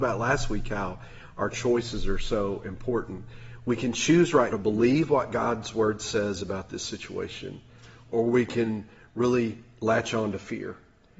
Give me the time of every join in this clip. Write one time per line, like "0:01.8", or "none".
0:04.5